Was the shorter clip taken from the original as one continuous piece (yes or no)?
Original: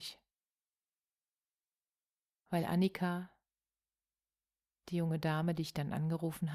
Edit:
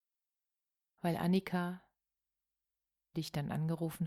no